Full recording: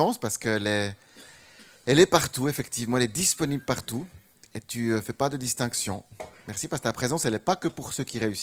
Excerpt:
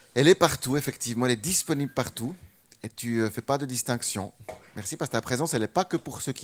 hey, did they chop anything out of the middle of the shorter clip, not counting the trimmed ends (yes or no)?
no